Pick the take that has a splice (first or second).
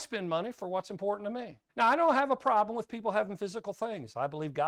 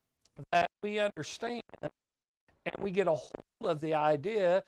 first